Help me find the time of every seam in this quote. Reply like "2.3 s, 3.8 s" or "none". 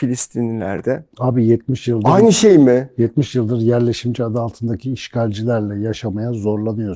none